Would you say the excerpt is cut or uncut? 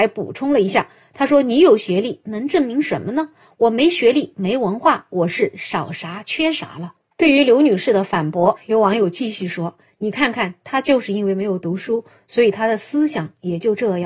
uncut